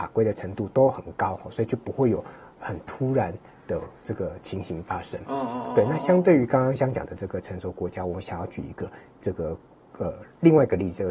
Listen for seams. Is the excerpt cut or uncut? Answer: uncut